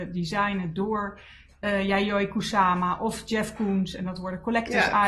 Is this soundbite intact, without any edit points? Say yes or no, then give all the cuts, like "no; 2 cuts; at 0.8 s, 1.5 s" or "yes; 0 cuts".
yes; 0 cuts